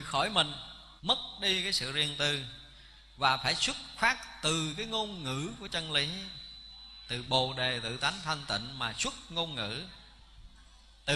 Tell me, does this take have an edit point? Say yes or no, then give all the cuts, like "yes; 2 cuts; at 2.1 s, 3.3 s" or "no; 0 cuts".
yes; 1 cut; at 1.0 s